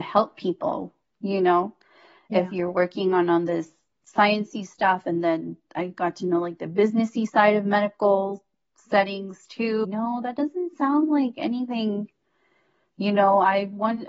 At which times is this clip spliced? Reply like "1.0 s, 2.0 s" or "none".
9.8 s